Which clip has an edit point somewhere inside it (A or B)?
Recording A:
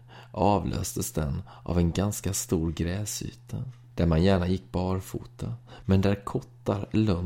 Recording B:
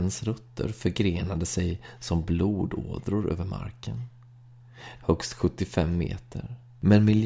B